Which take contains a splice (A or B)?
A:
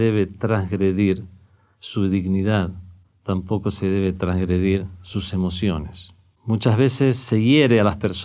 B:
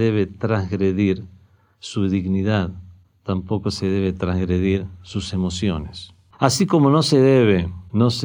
B